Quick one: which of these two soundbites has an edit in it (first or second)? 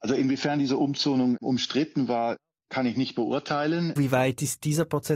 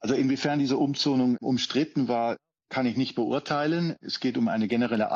first